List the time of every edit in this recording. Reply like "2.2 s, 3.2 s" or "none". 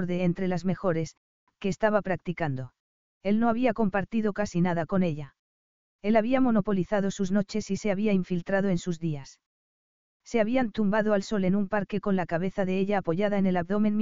3.2 s, 5.9 s